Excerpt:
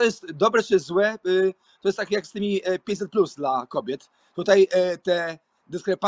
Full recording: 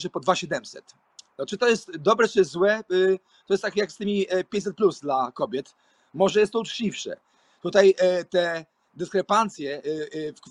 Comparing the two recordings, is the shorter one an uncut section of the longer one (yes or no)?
no